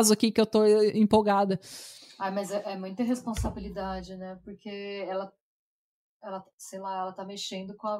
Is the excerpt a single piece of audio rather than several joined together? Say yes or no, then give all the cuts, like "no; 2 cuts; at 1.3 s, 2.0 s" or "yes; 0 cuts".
yes; 0 cuts